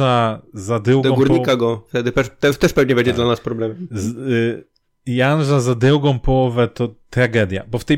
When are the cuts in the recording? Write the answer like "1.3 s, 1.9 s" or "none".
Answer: none